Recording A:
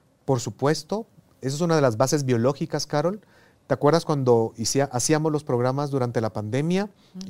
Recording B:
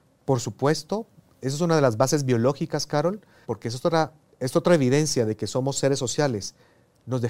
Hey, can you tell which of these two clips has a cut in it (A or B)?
B